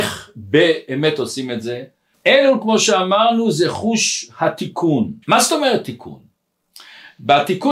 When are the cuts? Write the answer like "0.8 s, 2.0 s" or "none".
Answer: 5.2 s

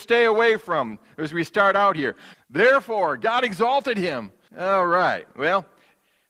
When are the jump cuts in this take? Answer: 2.3 s, 4.5 s

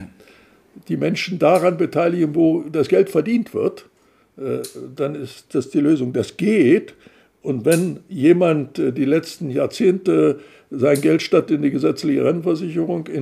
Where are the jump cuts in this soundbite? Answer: none

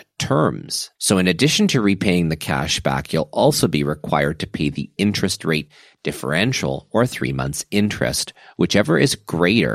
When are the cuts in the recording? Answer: 1.0 s

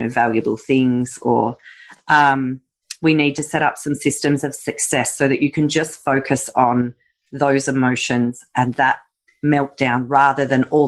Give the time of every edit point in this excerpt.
none

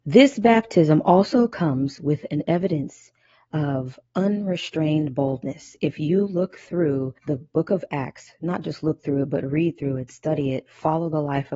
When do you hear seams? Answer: 7.2 s

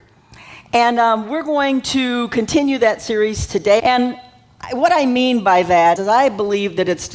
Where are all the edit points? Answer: 3.8 s, 6.0 s

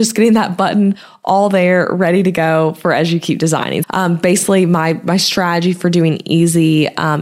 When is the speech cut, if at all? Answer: 3.8 s

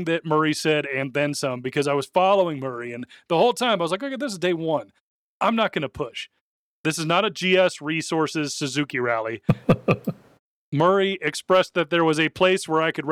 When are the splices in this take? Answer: none

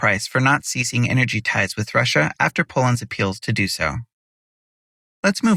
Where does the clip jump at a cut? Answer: none

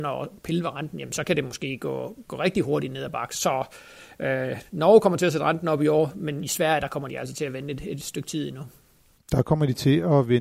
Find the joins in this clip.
none

